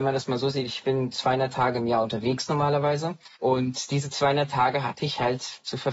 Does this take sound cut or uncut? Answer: cut